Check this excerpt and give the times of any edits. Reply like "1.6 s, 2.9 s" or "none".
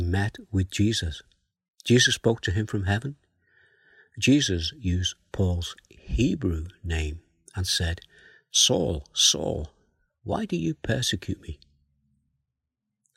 none